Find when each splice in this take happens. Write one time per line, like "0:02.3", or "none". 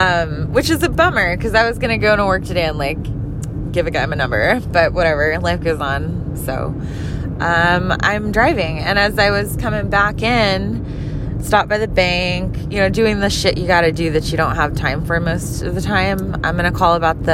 0:06.3